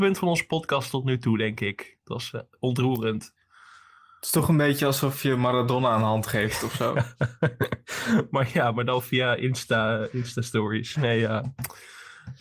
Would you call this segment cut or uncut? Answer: uncut